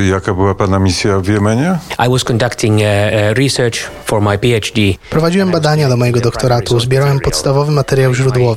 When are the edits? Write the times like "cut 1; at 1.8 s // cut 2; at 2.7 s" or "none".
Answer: none